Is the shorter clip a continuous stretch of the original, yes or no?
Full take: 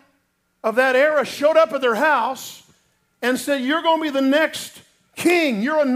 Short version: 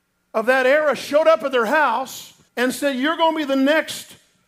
no